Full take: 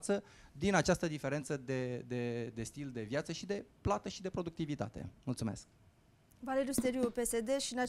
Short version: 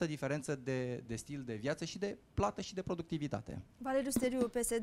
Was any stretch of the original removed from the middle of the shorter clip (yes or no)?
yes